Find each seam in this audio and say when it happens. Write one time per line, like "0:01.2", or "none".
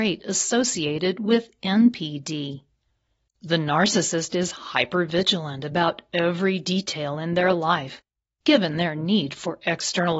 0:03.3

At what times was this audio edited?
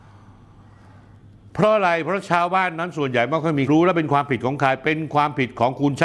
0:03.7

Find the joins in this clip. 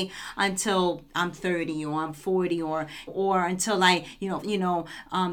0:03.1
0:04.4

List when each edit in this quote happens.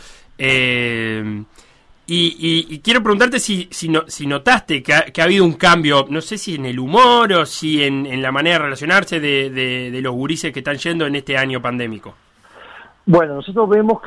none

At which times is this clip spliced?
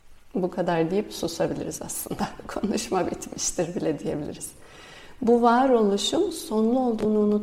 none

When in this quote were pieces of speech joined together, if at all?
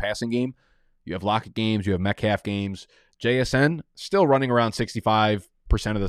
none

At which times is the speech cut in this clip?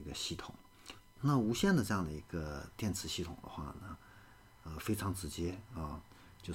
0:01.2

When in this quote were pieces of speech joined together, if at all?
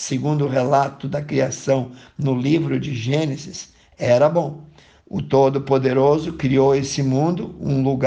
0:05.0

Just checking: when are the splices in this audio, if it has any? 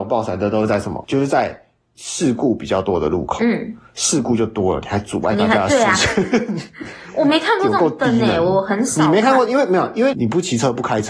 0:10.1

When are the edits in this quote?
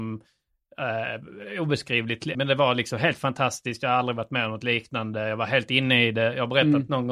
0:02.3

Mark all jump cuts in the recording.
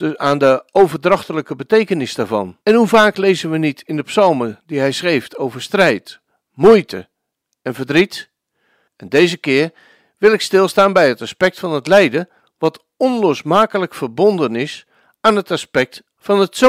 0:02.6
0:08.9

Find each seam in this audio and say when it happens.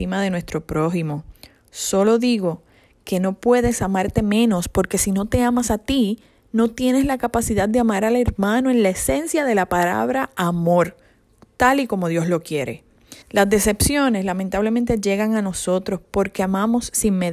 0:13.2

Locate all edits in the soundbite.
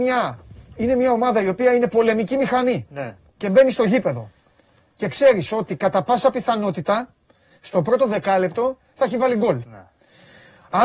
none

